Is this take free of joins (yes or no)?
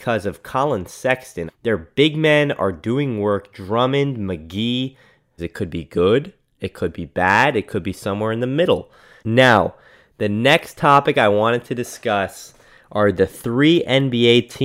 no